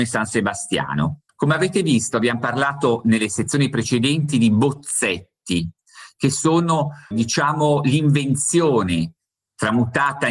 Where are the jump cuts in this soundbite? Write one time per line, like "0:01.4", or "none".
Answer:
0:01.3
0:07.1